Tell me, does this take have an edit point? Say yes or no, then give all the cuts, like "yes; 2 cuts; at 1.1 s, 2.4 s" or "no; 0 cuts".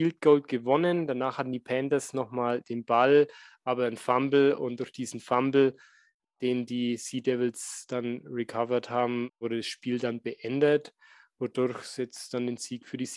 no; 0 cuts